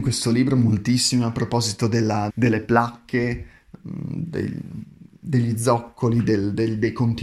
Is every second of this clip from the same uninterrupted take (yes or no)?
no